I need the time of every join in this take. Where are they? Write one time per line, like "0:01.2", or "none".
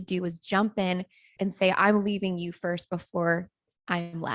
0:01.4